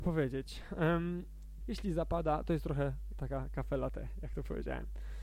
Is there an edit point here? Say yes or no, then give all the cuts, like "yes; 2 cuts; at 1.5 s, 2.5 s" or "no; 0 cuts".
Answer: yes; 1 cut; at 1.6 s